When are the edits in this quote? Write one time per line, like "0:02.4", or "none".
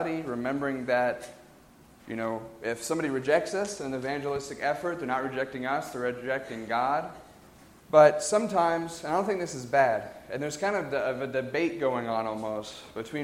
0:07.8